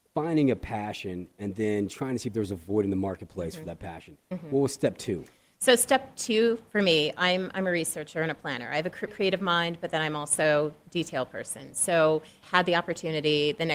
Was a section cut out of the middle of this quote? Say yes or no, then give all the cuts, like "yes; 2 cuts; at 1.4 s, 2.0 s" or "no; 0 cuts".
yes; 2 cuts; at 9.1 s, 12.4 s